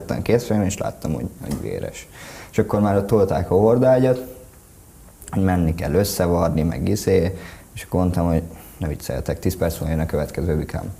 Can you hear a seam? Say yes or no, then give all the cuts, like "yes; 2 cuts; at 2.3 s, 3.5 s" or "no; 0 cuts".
yes; 1 cut; at 1.4 s